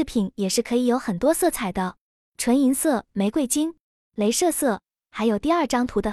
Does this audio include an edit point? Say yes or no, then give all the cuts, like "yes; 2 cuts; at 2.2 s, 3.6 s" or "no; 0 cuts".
no; 0 cuts